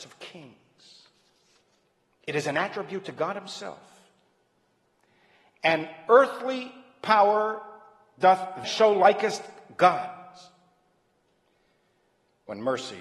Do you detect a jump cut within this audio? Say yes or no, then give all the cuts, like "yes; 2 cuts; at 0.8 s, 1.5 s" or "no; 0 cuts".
yes; 1 cut; at 8.6 s